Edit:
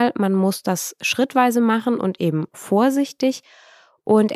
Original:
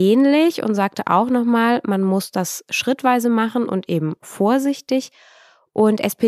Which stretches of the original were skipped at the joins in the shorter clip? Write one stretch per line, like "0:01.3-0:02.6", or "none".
none